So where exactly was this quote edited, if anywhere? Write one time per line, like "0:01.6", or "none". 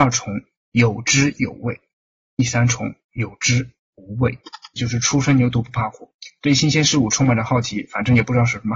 0:04.8

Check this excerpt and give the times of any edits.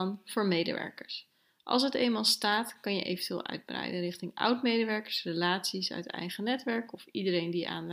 none

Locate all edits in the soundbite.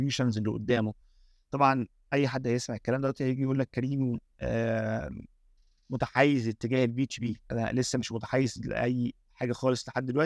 none

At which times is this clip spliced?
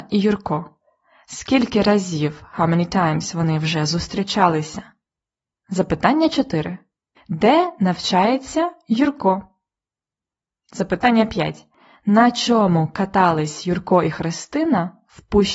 none

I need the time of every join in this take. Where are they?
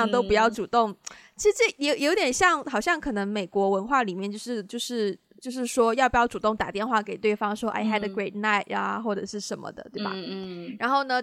none

